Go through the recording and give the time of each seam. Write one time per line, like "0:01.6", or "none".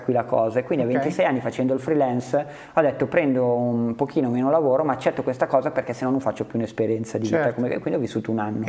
none